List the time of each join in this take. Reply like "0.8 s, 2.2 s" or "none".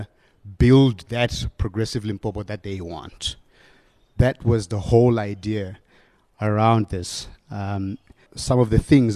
8.3 s